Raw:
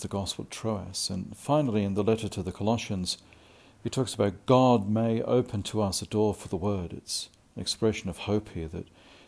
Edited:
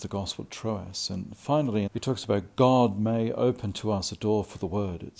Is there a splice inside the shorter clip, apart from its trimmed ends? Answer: yes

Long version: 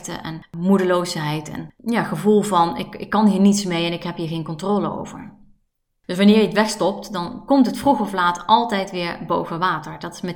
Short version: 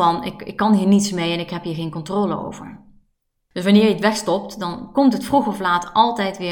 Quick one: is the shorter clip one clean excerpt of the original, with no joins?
yes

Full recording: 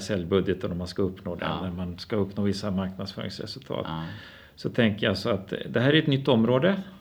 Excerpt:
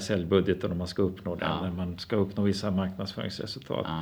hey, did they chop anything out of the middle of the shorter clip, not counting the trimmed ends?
no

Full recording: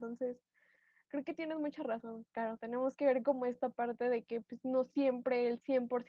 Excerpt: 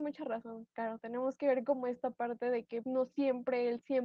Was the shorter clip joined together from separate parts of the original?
yes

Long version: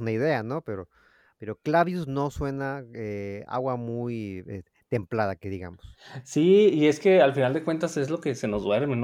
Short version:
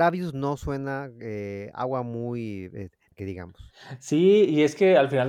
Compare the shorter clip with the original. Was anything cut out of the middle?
yes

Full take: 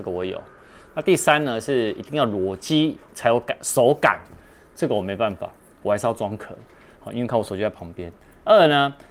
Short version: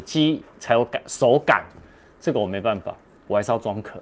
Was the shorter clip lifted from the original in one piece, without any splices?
yes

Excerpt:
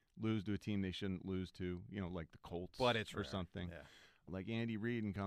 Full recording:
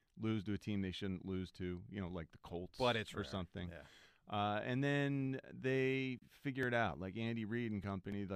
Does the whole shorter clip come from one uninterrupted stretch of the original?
no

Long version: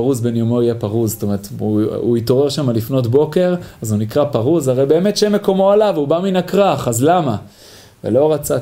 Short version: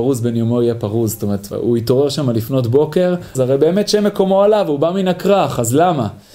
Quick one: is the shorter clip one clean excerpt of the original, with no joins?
no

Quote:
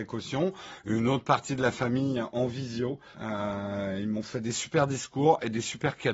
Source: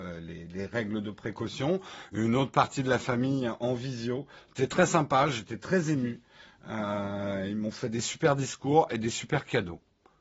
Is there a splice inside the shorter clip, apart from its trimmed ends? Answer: yes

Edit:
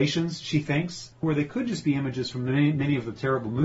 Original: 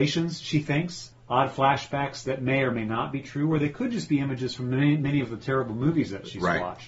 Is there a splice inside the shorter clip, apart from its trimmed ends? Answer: yes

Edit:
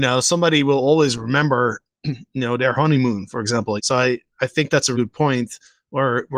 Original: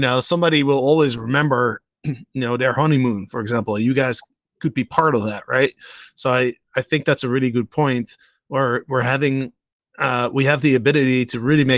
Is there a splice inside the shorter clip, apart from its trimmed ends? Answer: yes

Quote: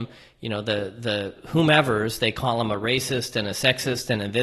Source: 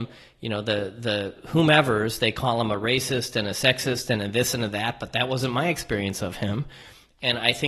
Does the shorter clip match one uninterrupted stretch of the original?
yes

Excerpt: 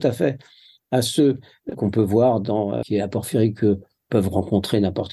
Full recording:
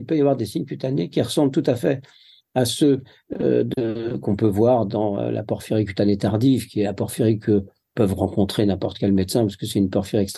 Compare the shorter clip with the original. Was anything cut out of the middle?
yes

